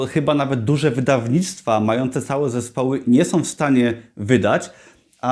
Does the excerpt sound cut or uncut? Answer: cut